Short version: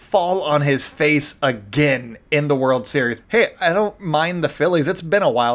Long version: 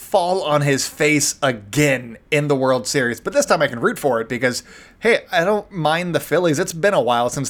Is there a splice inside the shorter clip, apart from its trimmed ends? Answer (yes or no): yes